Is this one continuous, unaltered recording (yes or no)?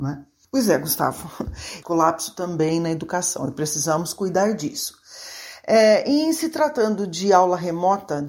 no